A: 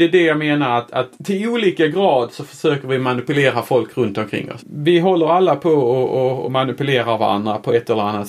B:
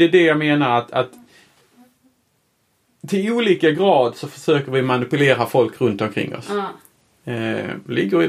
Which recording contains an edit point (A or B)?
A